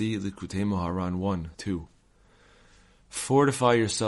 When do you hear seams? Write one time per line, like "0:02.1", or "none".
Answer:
0:01.5